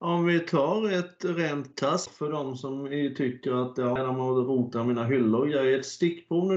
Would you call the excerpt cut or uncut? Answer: cut